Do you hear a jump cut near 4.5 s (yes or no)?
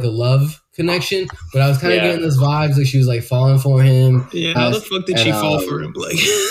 yes